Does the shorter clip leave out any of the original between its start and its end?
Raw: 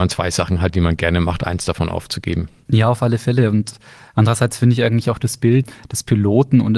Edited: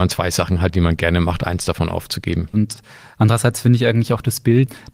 yes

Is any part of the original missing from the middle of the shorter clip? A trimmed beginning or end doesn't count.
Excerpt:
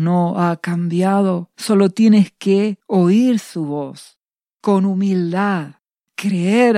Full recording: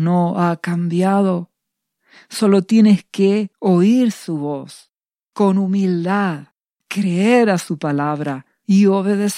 yes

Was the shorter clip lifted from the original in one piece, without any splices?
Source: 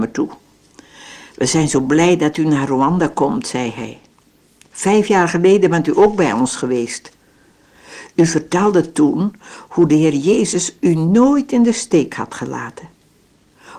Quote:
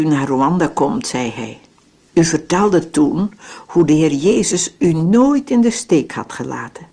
no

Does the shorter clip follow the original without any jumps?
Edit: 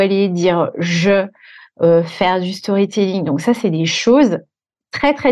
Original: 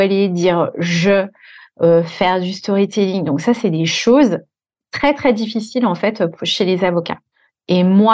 yes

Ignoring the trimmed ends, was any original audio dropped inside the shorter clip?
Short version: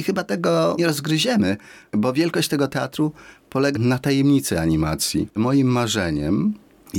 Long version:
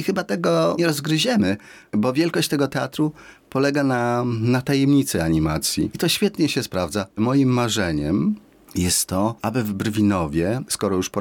yes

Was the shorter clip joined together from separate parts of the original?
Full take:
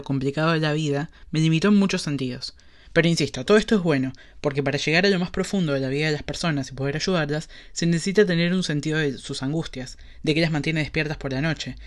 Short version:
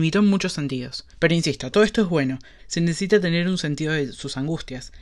yes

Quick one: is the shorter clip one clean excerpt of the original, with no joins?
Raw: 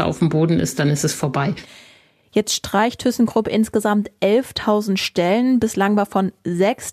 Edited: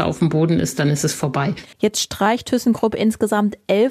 no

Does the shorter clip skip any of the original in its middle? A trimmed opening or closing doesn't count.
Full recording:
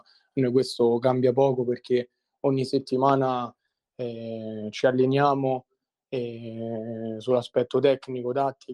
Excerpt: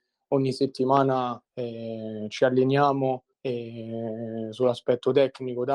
yes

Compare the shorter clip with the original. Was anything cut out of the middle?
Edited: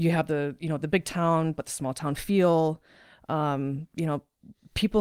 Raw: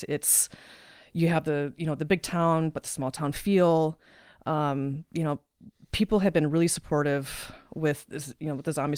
no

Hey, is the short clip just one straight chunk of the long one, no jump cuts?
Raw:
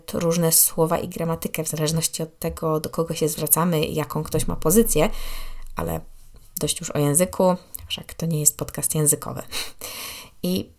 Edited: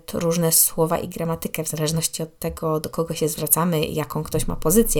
yes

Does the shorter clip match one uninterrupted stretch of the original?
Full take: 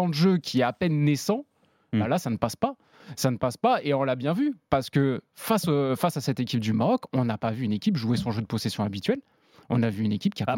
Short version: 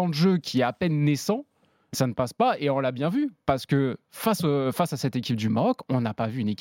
no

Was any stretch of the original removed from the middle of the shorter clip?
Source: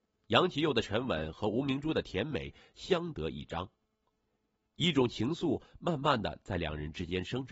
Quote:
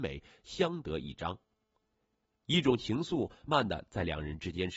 yes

